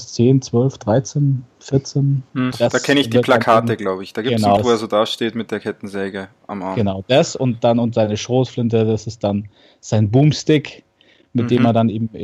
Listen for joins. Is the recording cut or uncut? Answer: cut